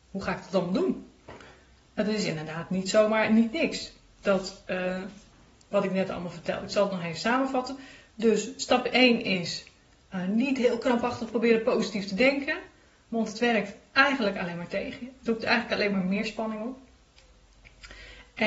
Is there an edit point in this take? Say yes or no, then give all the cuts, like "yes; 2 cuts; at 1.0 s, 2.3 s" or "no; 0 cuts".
no; 0 cuts